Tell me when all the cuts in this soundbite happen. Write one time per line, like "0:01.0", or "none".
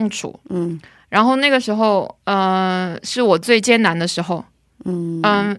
none